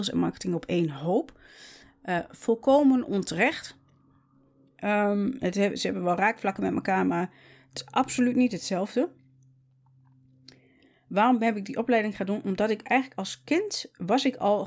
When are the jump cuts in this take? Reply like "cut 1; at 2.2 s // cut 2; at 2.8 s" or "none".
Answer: none